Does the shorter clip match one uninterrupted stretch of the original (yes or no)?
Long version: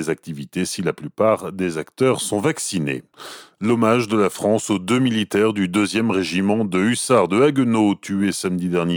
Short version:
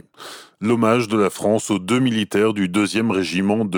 yes